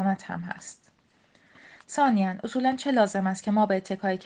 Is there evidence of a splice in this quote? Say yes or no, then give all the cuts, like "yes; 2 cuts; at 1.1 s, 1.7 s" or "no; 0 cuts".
no; 0 cuts